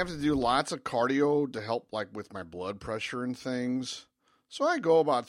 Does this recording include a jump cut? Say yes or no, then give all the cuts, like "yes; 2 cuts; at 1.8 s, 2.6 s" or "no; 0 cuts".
no; 0 cuts